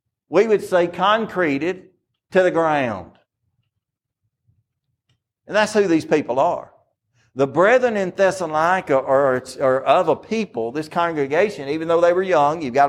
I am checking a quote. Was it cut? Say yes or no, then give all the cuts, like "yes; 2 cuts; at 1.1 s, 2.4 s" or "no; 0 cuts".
no; 0 cuts